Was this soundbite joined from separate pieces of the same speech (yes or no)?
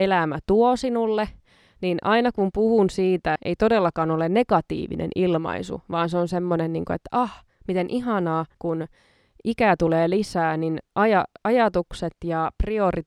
yes